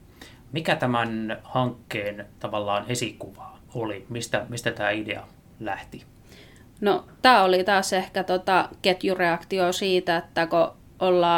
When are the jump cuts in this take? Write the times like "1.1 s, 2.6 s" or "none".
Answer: none